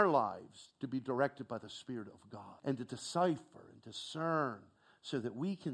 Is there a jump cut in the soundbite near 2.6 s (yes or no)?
yes